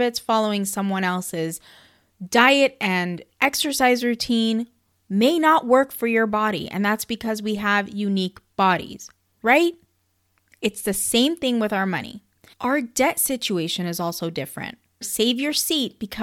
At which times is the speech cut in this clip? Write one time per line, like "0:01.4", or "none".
0:12.5
0:15.0